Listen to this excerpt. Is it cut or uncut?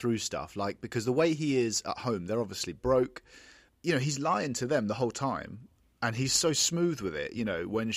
cut